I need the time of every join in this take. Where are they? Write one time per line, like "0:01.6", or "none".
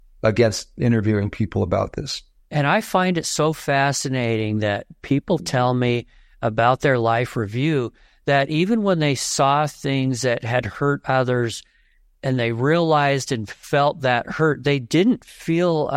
0:02.4